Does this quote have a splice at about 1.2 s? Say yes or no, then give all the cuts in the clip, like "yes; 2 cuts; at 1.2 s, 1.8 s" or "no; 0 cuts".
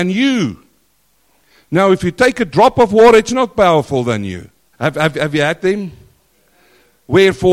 no; 1 cut; at 4.7 s